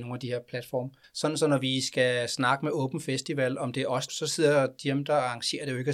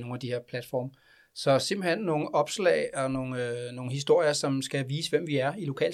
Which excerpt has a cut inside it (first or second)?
first